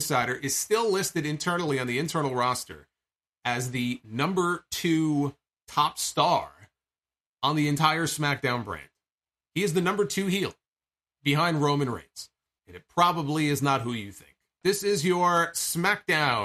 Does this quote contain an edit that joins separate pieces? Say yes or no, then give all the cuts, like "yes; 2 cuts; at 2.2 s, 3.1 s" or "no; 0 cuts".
yes; 2 cuts; at 12.6 s, 14.6 s